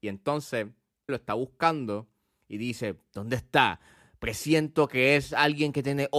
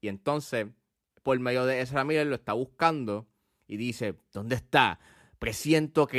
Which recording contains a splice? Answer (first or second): first